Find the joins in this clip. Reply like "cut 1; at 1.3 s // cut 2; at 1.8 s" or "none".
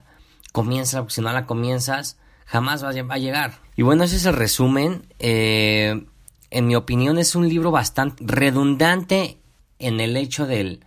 cut 1; at 3.6 s // cut 2; at 8.2 s